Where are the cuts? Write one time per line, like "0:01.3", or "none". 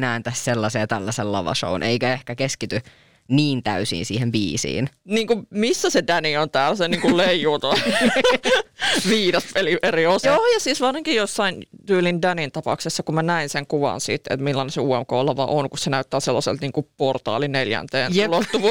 0:05.0
0:10.2